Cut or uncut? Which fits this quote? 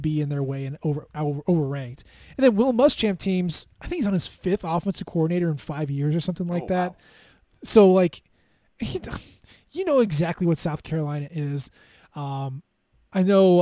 uncut